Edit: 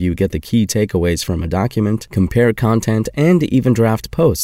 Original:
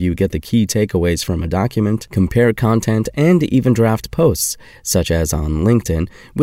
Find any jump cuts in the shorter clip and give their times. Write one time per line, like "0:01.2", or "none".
none